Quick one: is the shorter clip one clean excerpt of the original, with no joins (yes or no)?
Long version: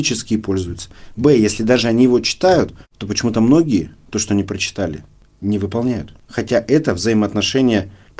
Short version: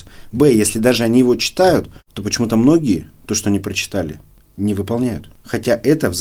yes